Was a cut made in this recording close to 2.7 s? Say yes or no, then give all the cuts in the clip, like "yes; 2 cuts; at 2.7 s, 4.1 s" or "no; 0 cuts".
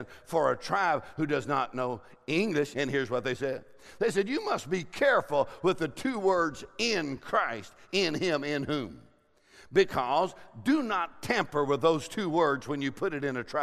yes; 1 cut; at 2.7 s